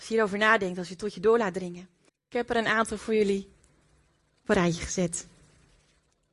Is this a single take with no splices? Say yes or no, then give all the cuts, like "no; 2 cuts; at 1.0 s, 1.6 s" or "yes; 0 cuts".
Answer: no; 1 cut; at 2.1 s